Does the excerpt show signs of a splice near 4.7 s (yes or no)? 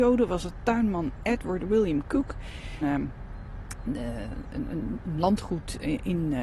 no